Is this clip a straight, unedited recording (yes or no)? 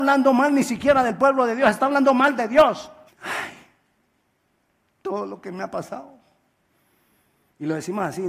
no